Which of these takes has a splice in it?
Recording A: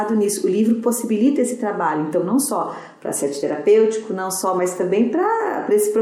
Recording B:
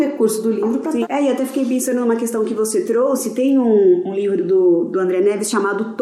B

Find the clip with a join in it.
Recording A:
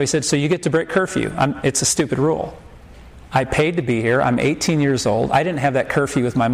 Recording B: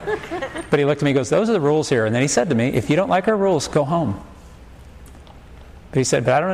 A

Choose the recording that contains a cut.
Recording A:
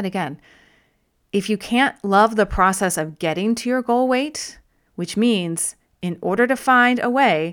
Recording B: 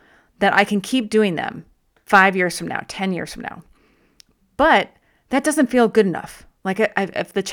A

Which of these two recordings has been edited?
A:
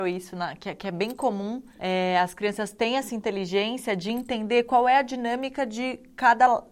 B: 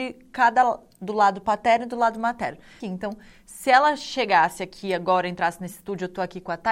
B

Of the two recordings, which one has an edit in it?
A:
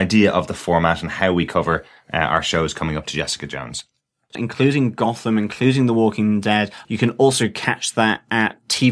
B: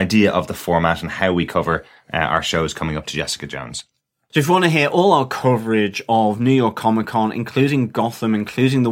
A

